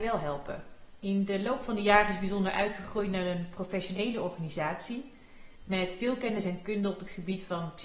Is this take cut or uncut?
cut